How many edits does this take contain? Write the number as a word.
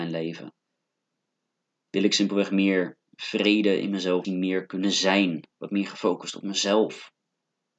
one